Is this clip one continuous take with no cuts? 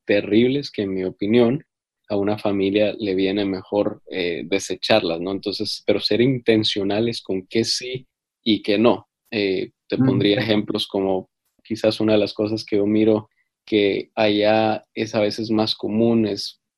yes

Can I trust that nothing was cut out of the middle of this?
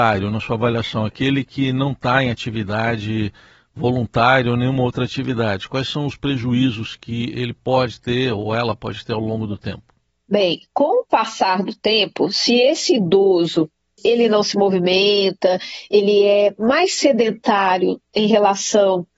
yes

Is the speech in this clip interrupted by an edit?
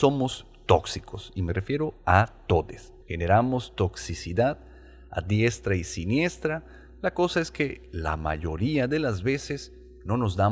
yes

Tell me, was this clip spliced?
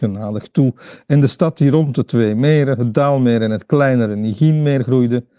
no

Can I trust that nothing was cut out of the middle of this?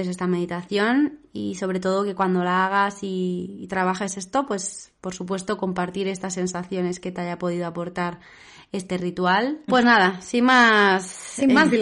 no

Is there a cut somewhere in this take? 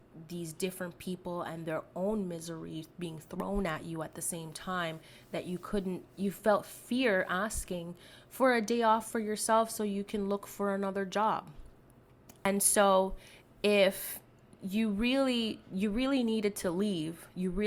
yes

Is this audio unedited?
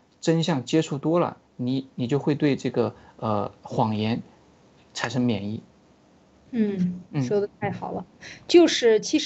yes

